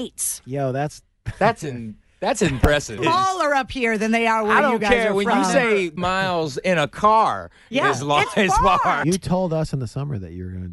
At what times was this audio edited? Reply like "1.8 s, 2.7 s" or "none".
3.0 s, 6.0 s, 9.0 s